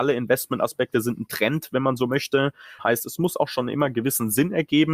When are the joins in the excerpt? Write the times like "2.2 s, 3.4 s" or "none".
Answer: 2.8 s